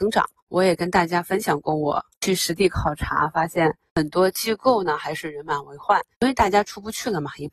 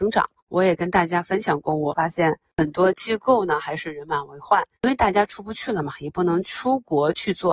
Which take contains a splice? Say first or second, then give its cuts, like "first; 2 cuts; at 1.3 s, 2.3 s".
second; 1 cut; at 1.9 s